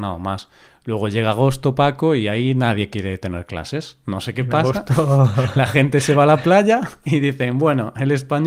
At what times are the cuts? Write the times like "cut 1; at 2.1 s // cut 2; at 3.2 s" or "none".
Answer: none

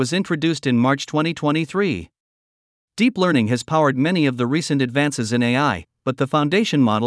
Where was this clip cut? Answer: cut 1; at 2.8 s

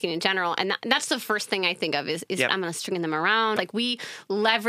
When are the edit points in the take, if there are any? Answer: cut 1; at 2.5 s // cut 2; at 3.6 s

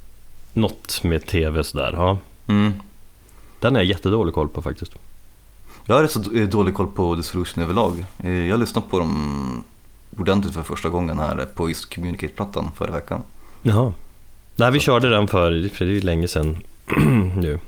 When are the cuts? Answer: none

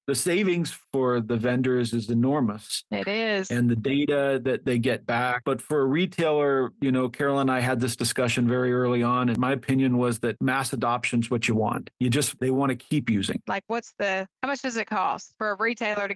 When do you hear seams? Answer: cut 1; at 12.4 s // cut 2; at 13.5 s

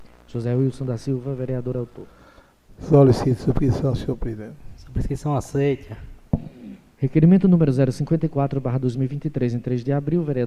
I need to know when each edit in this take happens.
cut 1; at 6.9 s

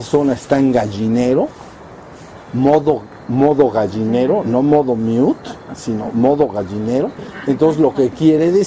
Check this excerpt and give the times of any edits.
none

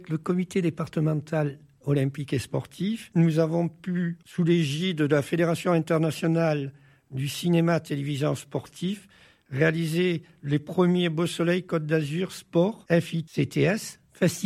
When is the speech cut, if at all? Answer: none

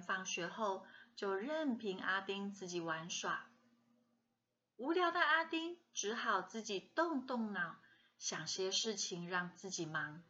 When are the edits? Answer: none

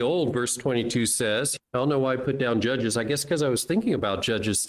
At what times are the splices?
cut 1; at 1.6 s

